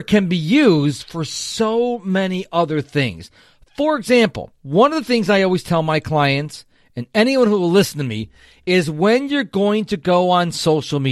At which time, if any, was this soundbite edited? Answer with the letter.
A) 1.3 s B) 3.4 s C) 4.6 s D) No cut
C